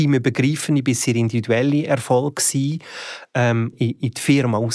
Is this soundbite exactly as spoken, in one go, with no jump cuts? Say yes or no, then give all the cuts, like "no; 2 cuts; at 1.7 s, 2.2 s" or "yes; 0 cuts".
no; 1 cut; at 3.7 s